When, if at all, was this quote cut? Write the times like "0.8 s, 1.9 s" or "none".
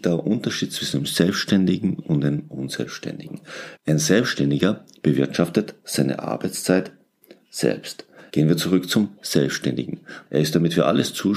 3.8 s, 8.3 s, 10.3 s